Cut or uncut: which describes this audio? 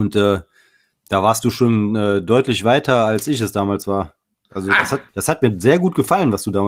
cut